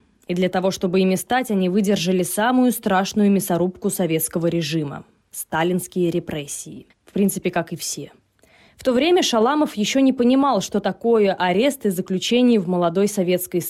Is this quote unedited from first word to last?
no; 2 cuts; at 6.9 s, 8.7 s

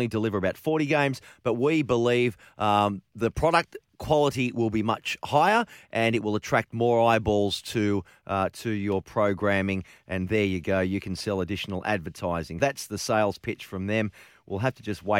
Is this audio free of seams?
no; 1 cut; at 12.6 s

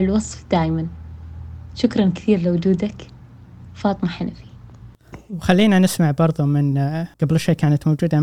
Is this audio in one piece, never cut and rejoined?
no; 1 cut; at 7.1 s

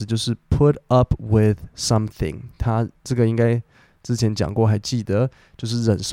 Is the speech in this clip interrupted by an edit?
no; 0 cuts

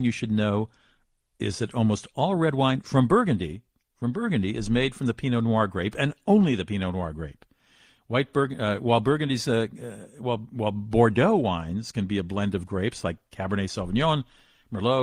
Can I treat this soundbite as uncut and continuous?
yes; 0 cuts

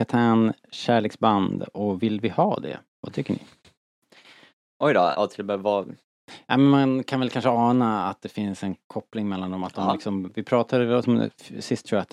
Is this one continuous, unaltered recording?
no; 1 cut; at 5.1 s

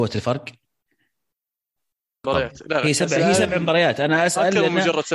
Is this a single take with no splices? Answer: no; 1 cut; at 2.2 s

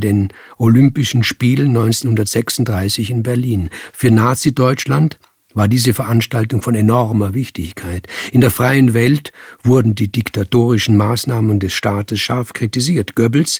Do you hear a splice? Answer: no; 0 cuts

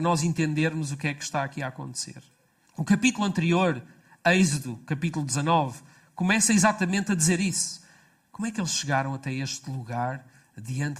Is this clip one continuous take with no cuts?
no; 2 cuts; at 2.7 s, 8.3 s

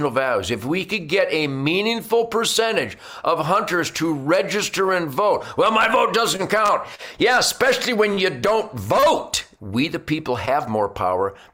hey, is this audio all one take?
no; 1 cut; at 9.6 s

